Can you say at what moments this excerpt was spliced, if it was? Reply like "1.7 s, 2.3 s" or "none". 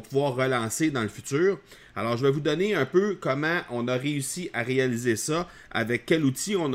none